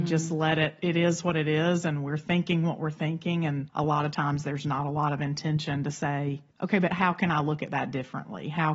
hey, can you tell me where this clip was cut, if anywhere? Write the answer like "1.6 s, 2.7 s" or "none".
3.7 s, 6.5 s

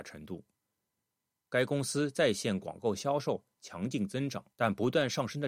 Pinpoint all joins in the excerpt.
4.5 s

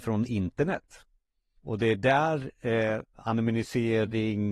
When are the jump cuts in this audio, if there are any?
1.6 s, 3.1 s

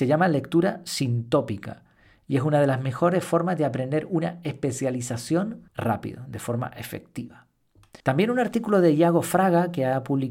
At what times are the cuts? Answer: 5.7 s, 8.0 s

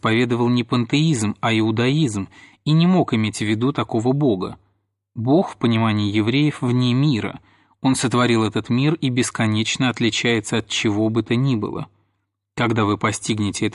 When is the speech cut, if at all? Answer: none

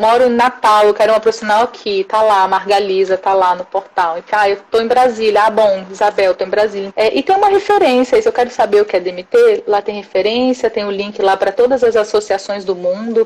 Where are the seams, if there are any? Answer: 6.9 s

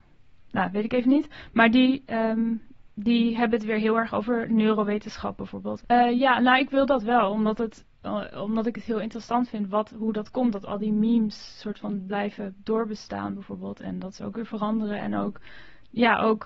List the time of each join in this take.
5.8 s

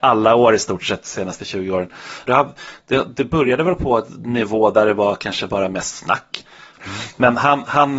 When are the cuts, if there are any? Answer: 2.3 s, 6.8 s

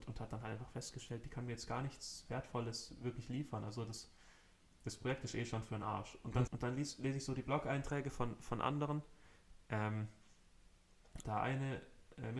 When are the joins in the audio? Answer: 6.5 s, 11.2 s

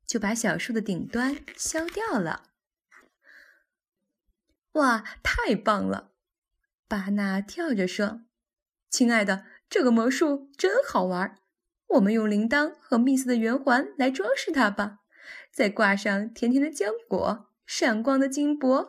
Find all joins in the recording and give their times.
none

